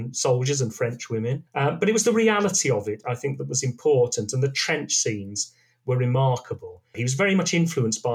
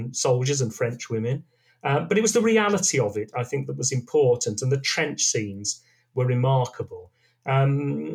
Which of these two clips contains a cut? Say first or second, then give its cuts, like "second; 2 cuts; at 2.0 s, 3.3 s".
first; 2 cuts; at 1.5 s, 6.9 s